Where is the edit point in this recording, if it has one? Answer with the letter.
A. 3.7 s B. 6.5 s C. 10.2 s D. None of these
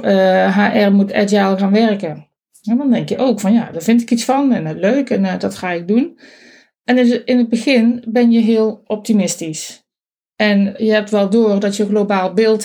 A